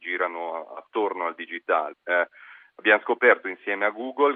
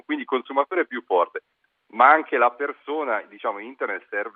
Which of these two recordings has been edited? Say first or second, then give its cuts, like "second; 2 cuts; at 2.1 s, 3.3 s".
first; 1 cut; at 1.9 s